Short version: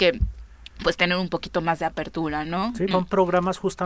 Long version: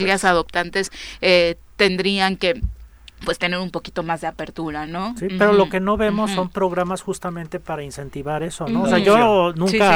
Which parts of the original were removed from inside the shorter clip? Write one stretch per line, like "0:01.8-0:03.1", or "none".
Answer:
0:05.3-0:06.3